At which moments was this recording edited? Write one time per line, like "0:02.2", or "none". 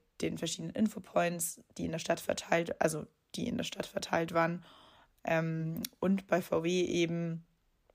none